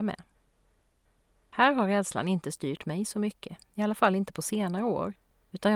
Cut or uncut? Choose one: uncut